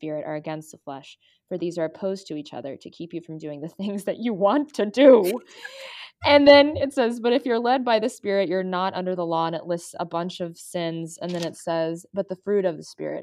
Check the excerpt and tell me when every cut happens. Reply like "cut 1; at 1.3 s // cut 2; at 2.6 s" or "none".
none